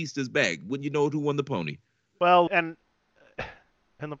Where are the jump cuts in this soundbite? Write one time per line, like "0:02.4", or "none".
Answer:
0:02.5